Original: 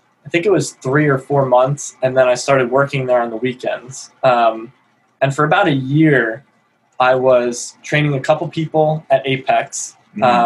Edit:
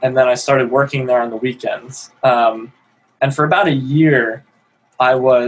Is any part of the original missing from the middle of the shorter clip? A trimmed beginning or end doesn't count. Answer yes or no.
no